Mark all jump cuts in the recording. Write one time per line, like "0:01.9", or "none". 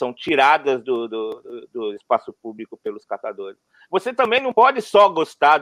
0:03.8